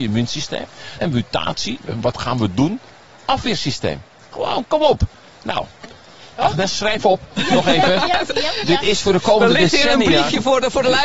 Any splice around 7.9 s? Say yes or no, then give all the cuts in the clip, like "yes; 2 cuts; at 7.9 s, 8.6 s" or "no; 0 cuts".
no; 1 cut; at 1.0 s